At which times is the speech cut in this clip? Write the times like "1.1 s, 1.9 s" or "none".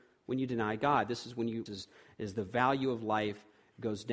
1.7 s